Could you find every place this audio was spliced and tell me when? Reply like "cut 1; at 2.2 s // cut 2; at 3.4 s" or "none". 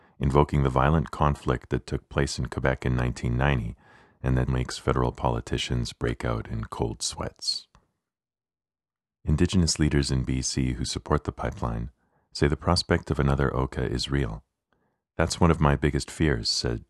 cut 1; at 4.5 s